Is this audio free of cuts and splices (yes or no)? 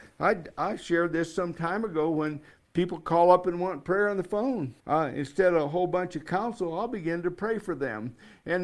no